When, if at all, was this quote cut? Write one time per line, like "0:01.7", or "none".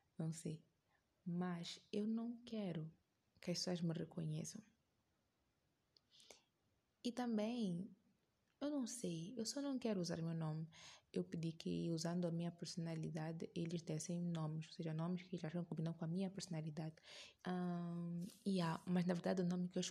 0:11.0
0:17.3